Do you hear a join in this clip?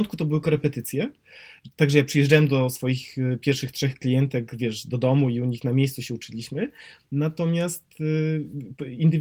no; 0 cuts

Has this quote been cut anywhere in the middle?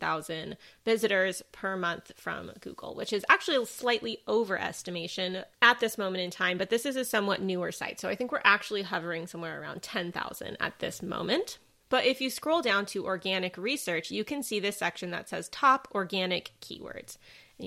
no; 0 cuts

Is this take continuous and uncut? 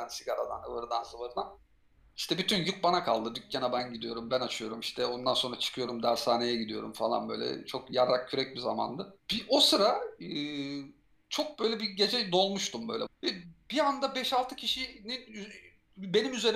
no; 2 cuts; at 9.2 s, 13.1 s

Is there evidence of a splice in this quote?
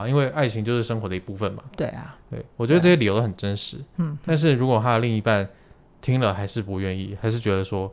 no; 0 cuts

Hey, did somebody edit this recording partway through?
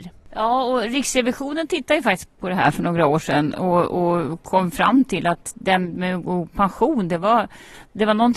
no; 0 cuts

